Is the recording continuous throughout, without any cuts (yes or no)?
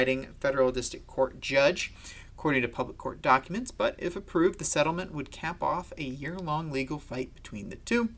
yes